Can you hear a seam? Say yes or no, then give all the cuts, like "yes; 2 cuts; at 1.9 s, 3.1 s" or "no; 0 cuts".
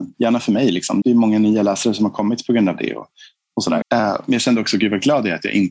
yes; 2 cuts; at 1.0 s, 3.8 s